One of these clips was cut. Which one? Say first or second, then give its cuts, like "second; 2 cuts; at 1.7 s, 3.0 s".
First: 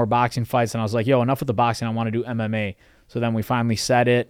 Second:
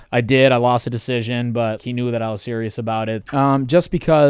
second; 2 cuts; at 1.8 s, 3.2 s